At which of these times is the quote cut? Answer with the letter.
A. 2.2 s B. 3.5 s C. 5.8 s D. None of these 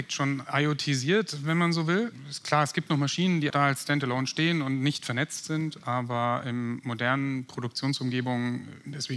B